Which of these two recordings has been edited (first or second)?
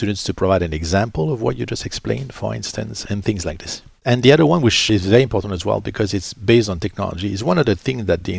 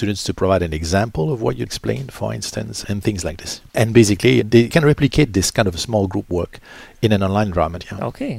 second